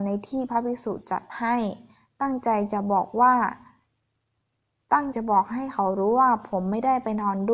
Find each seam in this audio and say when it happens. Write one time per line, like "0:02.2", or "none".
0:05.1

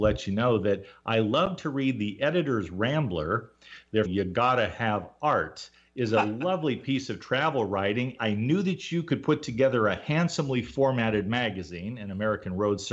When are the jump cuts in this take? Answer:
0:04.0
0:08.2

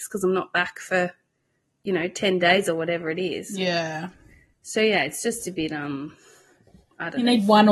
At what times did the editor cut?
none

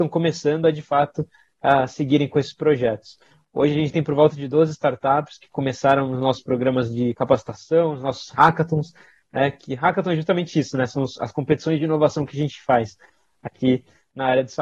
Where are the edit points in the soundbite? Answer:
none

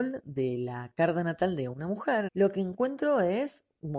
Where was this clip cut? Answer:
0:02.3

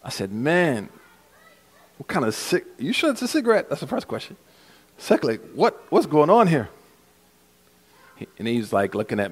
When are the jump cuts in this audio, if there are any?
none

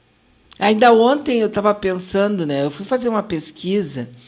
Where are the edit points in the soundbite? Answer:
none

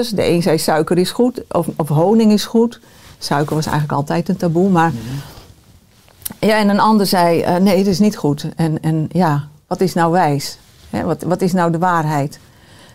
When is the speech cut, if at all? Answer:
none

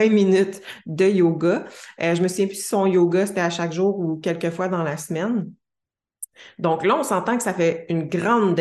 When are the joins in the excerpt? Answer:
none

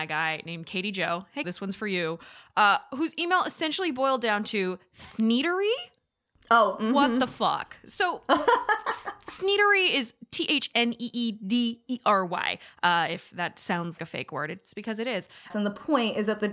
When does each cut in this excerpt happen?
0:01.4
0:14.0
0:15.5

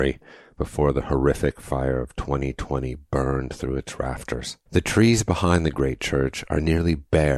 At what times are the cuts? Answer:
0:04.7

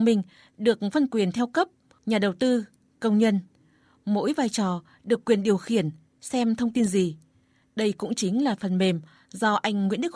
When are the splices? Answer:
0:02.0

